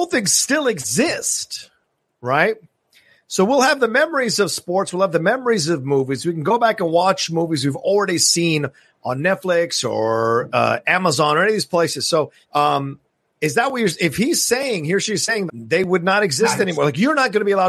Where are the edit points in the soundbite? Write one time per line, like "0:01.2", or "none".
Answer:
0:12.4
0:15.5